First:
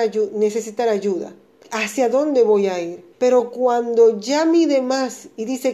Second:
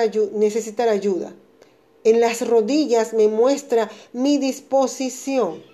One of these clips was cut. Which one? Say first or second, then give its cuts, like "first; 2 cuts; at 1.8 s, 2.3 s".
first; 2 cuts; at 1.6 s, 3.1 s